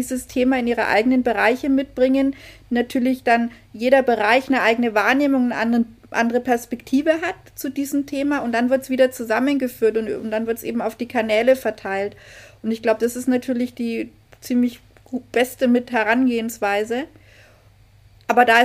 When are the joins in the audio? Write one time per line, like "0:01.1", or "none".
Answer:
none